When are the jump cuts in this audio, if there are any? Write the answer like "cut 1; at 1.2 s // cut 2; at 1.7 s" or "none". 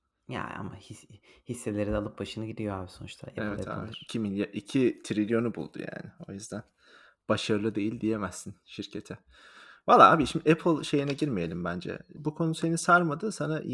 cut 1; at 12.2 s